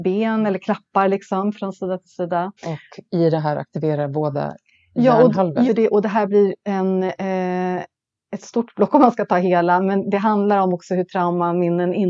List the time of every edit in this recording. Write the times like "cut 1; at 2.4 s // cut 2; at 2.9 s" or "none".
cut 1; at 2.6 s // cut 2; at 5.7 s